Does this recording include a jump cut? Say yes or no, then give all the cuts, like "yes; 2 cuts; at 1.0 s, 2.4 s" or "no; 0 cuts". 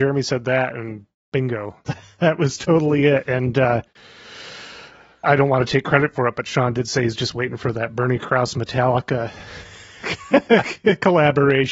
yes; 1 cut; at 5.2 s